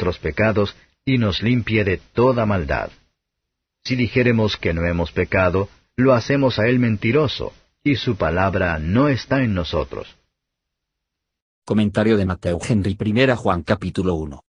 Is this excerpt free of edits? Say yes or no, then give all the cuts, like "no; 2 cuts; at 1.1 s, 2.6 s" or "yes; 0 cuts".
yes; 0 cuts